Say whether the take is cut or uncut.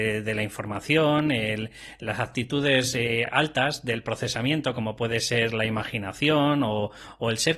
uncut